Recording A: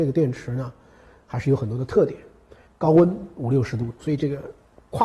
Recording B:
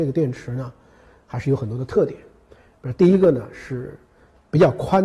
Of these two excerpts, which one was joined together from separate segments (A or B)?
A